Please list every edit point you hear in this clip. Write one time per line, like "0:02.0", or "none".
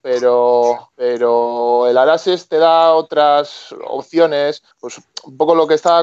0:00.9
0:04.7